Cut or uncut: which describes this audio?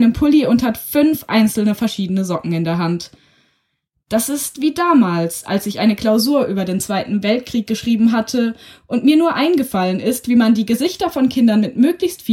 uncut